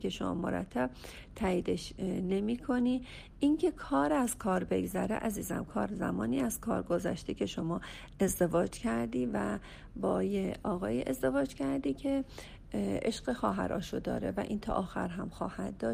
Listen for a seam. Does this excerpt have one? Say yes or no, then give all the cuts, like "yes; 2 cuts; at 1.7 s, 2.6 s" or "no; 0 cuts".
no; 0 cuts